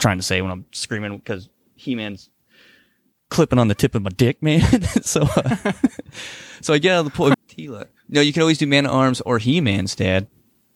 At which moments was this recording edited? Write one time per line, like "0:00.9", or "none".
0:07.3